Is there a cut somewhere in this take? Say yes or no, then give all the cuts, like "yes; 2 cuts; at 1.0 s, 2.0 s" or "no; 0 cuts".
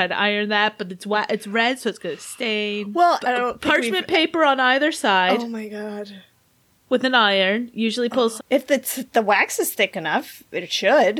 yes; 2 cuts; at 3.2 s, 8.4 s